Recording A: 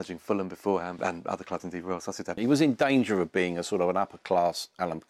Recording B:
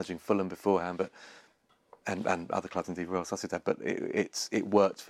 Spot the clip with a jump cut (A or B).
A